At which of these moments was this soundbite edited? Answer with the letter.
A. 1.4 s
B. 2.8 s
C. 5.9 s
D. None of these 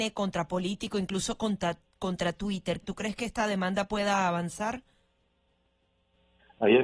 B